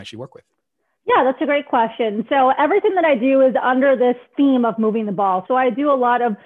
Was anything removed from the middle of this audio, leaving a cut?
yes; 1 cut; at 5.5 s

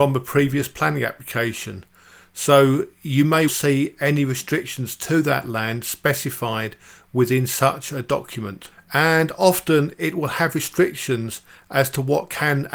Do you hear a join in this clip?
yes; 2 cuts; at 3.5 s, 8.7 s

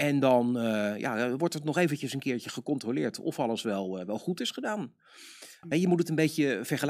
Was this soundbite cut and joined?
yes; 1 cut; at 5.6 s

